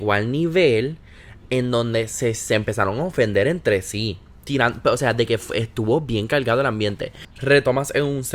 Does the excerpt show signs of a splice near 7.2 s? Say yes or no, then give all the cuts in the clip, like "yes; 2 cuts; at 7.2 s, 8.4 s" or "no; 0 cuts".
yes; 1 cut; at 7.2 s